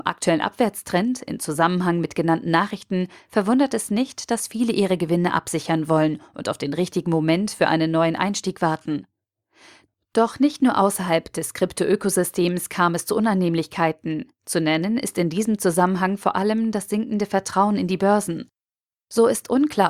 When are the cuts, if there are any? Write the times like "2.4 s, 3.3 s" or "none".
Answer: 18.9 s